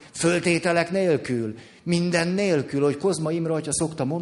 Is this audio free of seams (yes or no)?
yes